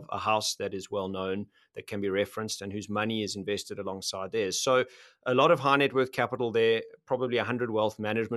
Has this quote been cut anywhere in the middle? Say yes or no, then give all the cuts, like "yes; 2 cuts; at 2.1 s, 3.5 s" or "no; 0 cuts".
no; 0 cuts